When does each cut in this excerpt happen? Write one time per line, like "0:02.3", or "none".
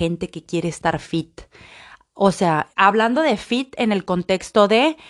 0:02.7